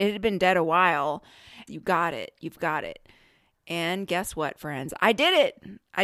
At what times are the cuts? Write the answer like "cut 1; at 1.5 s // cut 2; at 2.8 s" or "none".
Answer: cut 1; at 1.7 s

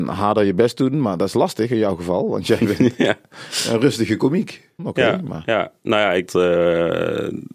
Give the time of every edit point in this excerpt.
cut 1; at 4.8 s // cut 2; at 6.3 s

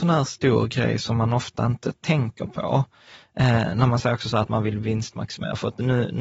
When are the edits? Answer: none

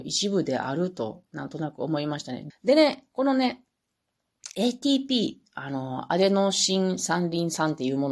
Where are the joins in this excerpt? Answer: cut 1; at 2.5 s

